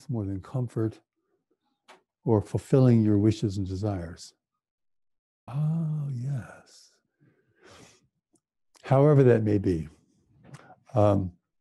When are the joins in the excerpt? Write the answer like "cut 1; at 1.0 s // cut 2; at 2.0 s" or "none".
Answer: cut 1; at 5.5 s // cut 2; at 7.1 s